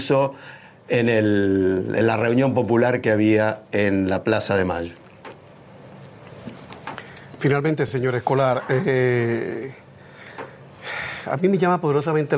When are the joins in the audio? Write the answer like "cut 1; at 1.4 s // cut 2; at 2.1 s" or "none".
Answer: none